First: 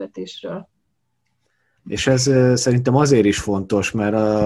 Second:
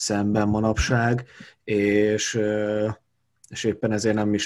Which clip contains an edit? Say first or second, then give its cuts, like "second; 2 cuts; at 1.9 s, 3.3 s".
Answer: first; 1 cut; at 1.8 s